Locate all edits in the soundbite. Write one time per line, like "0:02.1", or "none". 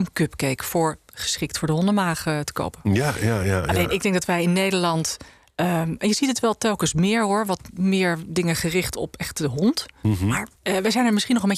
0:10.6